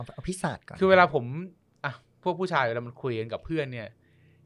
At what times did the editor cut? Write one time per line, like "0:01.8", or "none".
none